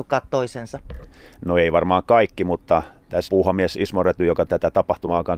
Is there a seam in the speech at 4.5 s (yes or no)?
yes